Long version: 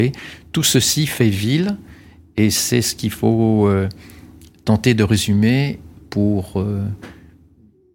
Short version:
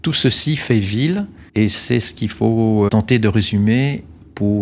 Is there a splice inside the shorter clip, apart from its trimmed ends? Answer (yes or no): yes